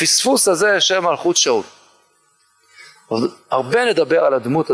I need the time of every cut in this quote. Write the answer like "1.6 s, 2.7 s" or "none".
none